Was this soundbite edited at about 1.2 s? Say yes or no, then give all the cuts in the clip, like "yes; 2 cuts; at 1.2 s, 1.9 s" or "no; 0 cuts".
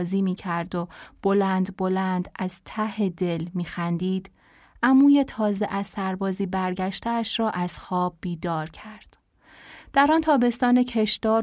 no; 0 cuts